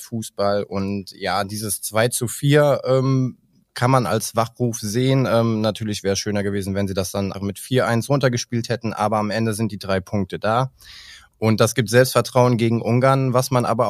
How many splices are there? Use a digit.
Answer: 1